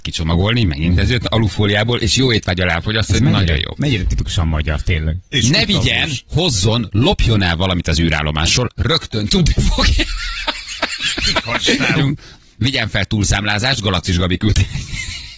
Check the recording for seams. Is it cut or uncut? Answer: cut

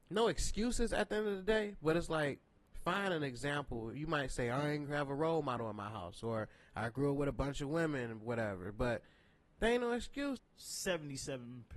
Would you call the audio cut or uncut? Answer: cut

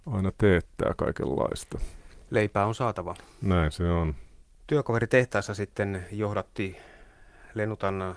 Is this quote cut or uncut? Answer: uncut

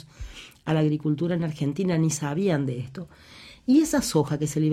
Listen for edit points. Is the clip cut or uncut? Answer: uncut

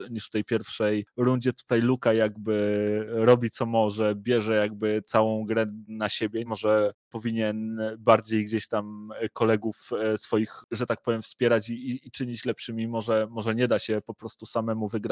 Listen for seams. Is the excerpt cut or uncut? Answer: cut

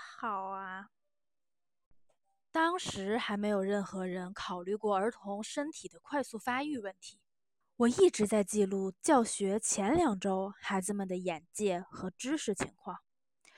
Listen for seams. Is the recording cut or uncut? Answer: cut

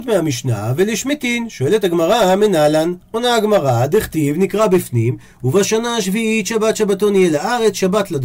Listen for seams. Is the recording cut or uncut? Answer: cut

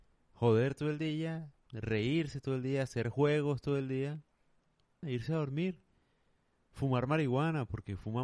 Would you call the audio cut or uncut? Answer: cut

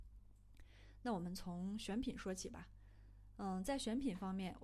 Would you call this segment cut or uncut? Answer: uncut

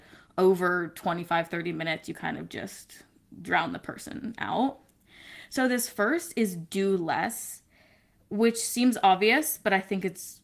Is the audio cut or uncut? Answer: uncut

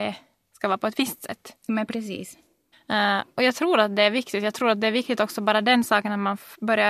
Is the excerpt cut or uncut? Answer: cut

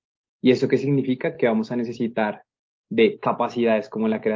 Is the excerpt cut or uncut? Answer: uncut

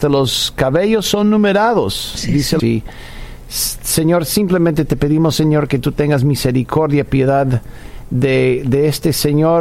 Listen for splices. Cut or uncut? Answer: cut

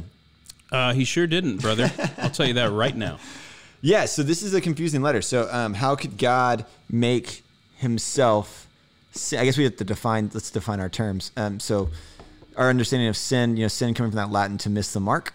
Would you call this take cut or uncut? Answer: uncut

